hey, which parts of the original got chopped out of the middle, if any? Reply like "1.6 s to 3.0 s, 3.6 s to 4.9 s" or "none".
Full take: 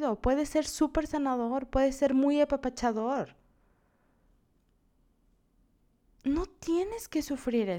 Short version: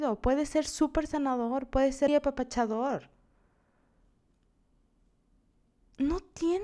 2.1 s to 2.3 s